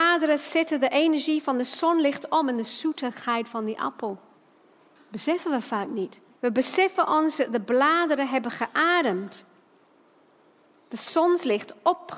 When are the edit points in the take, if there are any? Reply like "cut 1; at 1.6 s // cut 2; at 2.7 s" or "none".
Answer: cut 1; at 5.0 s // cut 2; at 6.3 s